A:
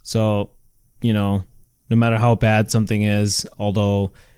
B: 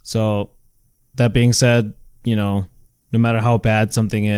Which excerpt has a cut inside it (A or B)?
A